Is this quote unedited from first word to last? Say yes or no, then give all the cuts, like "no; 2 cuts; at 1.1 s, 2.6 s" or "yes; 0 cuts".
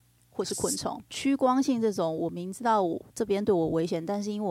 no; 1 cut; at 1.1 s